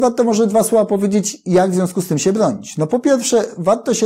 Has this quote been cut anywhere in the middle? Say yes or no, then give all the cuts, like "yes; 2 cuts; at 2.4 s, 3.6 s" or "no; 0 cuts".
no; 0 cuts